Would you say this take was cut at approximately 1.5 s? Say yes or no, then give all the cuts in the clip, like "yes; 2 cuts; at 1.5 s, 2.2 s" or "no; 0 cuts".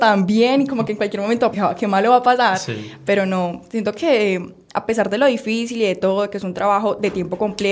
yes; 1 cut; at 1.5 s